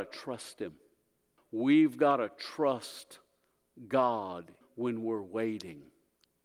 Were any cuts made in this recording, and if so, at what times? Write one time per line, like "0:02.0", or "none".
0:01.4
0:04.6